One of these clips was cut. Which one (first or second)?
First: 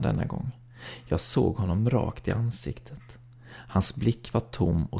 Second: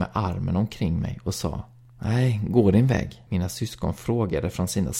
second